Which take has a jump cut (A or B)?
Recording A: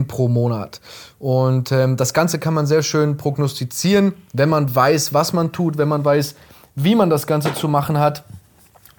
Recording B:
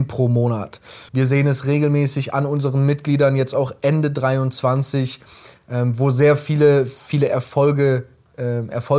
B